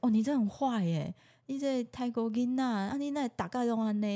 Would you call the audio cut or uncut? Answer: uncut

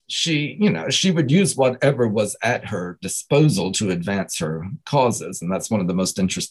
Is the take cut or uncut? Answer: uncut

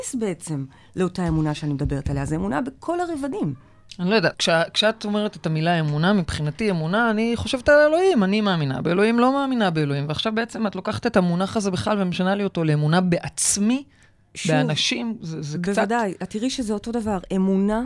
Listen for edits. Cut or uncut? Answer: cut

